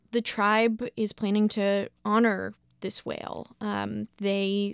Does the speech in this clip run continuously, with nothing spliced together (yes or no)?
yes